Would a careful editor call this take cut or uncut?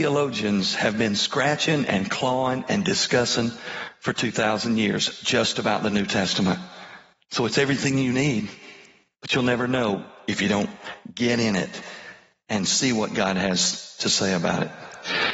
uncut